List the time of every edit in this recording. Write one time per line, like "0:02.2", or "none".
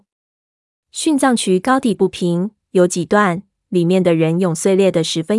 none